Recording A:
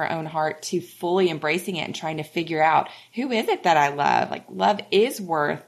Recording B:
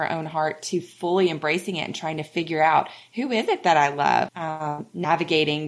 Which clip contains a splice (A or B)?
B